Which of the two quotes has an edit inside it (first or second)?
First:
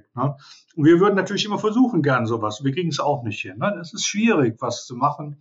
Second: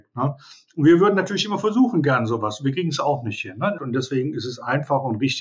second